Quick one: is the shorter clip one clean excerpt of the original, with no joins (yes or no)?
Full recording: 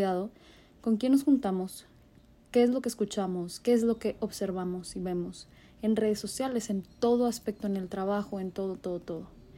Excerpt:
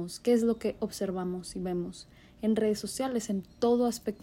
yes